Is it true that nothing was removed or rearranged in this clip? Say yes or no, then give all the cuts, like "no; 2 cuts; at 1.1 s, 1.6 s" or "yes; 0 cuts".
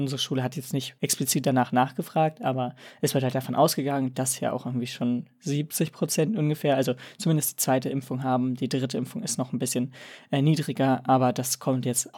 no; 1 cut; at 4.1 s